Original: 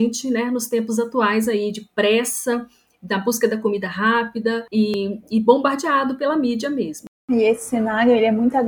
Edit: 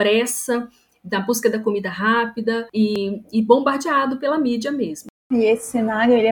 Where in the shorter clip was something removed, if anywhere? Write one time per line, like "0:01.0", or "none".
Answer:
none